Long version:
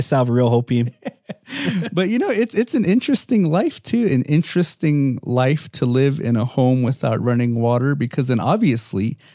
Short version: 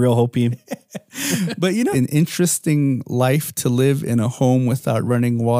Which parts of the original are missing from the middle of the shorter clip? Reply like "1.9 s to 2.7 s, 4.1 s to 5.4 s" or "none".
2.3 s to 4.1 s